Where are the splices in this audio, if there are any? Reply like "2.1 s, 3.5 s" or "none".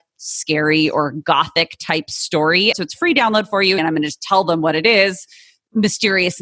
2.7 s, 3.8 s